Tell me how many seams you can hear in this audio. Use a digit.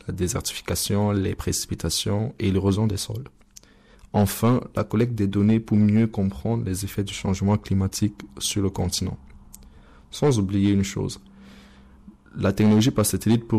0